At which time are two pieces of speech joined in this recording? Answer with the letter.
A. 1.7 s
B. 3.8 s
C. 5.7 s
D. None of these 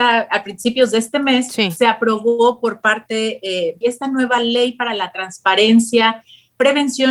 B